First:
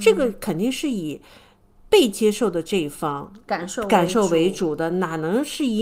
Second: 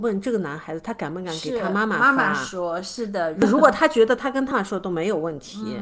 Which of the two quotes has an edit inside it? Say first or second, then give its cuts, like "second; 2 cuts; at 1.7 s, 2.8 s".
second; 1 cut; at 4.5 s